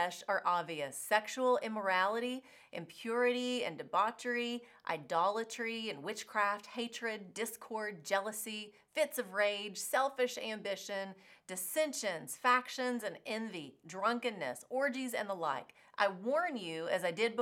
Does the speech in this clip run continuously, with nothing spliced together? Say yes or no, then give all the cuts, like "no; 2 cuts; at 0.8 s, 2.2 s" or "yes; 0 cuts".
yes; 0 cuts